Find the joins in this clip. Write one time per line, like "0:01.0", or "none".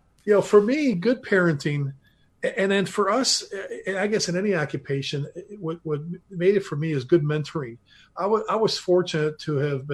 none